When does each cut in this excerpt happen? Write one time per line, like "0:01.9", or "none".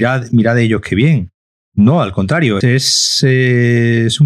0:02.6